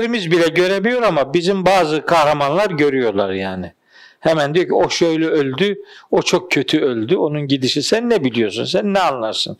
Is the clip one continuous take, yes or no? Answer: yes